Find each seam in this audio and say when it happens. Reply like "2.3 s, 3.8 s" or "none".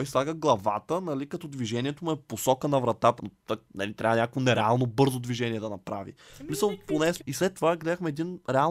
3.2 s, 7.2 s